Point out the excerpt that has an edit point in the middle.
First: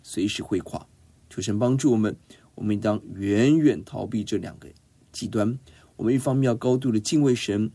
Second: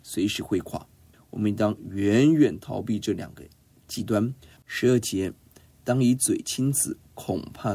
second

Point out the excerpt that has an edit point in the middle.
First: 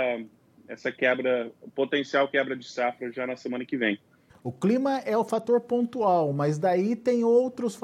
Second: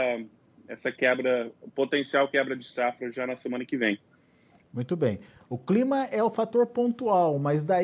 first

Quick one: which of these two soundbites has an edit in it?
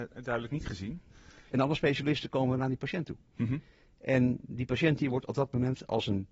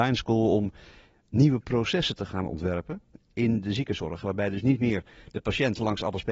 first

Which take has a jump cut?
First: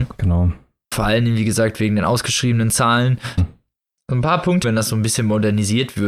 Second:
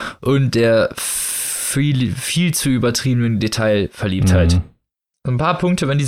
first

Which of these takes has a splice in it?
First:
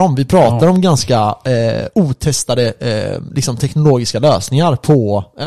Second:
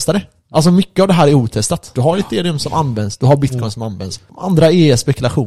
second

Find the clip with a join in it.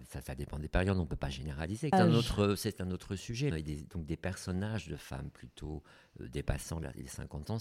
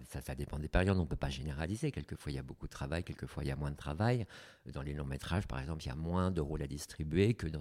first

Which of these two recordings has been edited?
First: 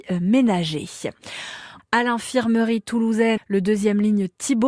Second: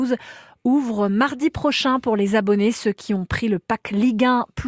first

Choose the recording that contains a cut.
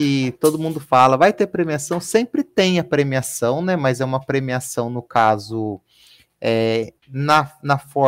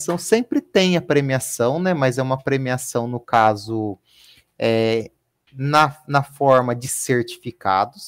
first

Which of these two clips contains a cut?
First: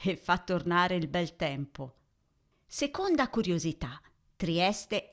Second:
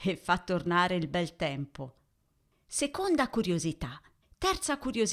second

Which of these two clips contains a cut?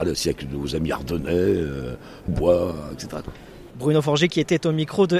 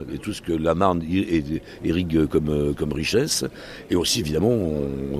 first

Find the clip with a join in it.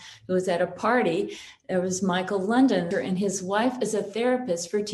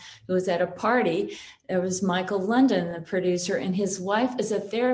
first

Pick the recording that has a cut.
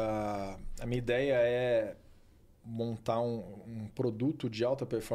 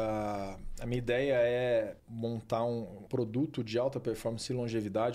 second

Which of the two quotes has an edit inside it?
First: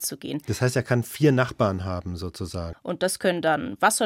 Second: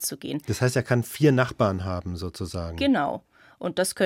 first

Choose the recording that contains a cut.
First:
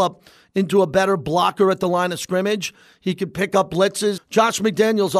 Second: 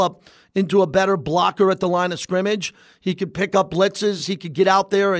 first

